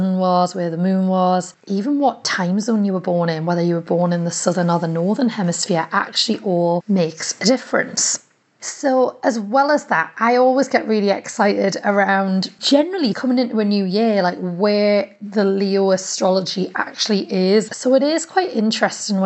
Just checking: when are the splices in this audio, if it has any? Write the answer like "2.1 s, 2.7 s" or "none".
13.1 s, 17.7 s